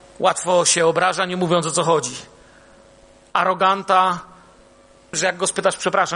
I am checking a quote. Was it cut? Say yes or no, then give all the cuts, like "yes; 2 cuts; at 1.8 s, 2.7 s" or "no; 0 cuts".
yes; 1 cut; at 5.1 s